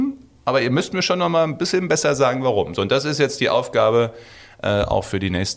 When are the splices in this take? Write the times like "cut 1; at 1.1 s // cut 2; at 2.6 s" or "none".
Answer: none